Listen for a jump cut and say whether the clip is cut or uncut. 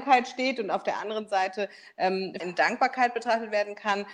cut